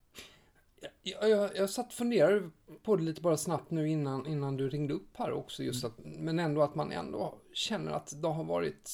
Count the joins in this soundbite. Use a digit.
1